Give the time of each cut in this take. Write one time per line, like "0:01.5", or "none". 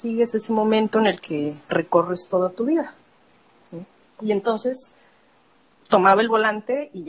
0:04.0